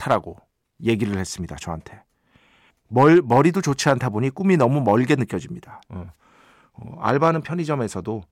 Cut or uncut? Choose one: cut